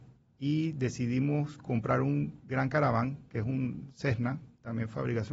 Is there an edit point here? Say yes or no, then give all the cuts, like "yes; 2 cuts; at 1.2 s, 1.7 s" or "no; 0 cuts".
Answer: no; 0 cuts